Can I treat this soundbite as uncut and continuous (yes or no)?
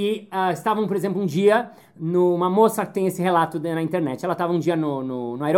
yes